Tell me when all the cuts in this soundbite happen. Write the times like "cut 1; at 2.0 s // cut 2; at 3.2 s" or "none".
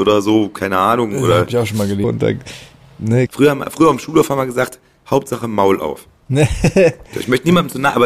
cut 1; at 2.0 s // cut 2; at 3.3 s